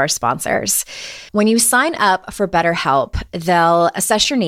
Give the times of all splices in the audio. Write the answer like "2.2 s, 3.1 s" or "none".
1.3 s

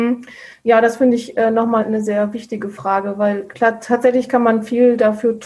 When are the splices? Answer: 1.8 s, 3.5 s

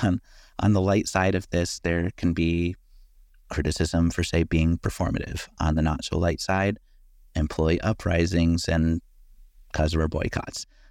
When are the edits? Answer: none

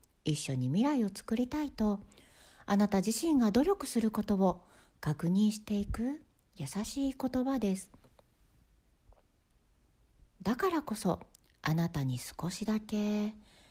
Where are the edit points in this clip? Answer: 10.2 s

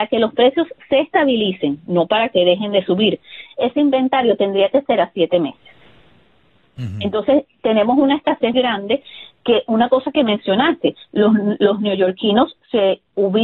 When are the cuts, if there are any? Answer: 8.5 s

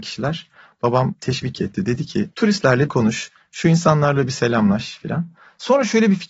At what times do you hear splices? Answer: 2.3 s

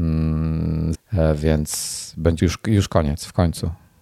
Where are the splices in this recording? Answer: 0.9 s, 2.4 s

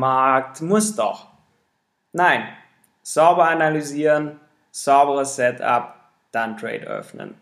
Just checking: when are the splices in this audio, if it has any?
none

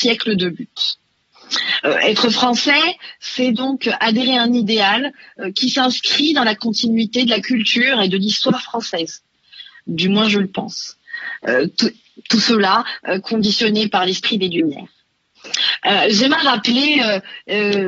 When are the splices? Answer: none

